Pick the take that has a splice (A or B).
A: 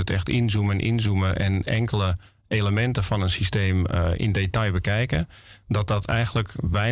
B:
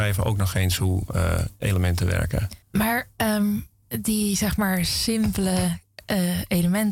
B